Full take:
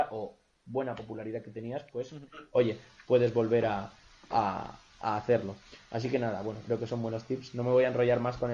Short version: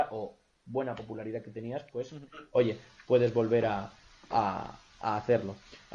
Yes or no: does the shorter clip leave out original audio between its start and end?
no